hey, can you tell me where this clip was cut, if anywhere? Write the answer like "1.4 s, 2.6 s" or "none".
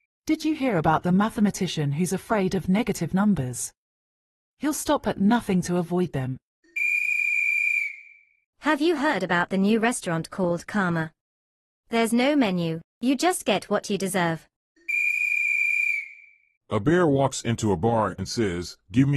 none